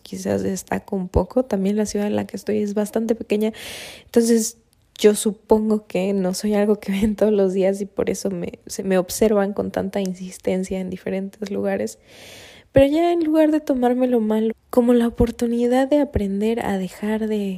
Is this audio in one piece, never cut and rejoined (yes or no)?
no